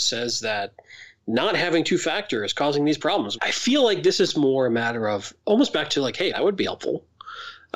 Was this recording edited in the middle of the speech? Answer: yes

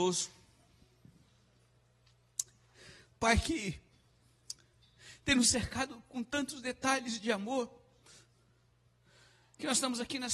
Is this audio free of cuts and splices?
yes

